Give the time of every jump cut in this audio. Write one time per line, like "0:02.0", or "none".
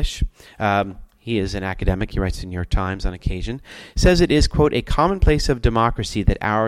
none